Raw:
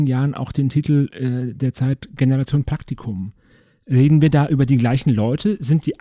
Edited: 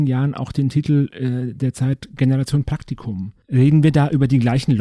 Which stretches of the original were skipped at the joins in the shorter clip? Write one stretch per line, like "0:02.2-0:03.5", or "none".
0:03.4-0:03.8